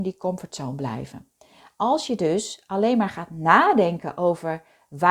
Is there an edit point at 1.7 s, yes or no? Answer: no